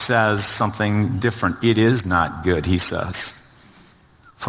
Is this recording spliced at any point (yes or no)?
no